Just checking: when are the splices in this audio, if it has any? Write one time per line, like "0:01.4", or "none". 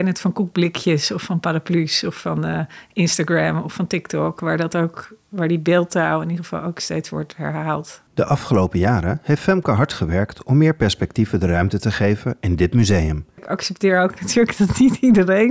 0:08.1
0:13.4